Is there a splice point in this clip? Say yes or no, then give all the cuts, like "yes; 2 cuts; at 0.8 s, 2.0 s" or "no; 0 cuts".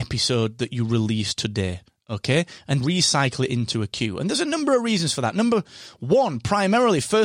yes; 1 cut; at 2.8 s